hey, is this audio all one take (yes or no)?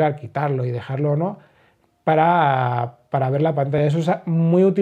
yes